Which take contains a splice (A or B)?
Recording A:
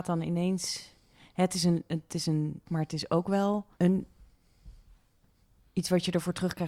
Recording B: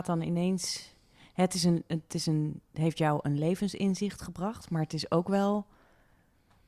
A